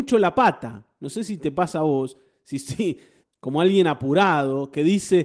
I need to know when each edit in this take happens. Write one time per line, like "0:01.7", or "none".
0:03.2